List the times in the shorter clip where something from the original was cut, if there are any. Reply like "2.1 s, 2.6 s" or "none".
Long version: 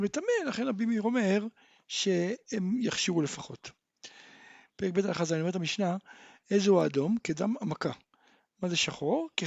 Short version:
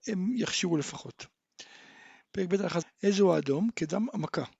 2.8 s